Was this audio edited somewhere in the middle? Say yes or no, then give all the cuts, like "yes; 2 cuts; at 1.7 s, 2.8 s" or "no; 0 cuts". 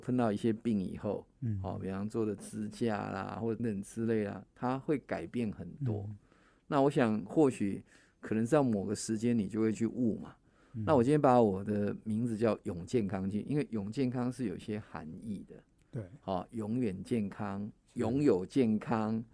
yes; 1 cut; at 3.6 s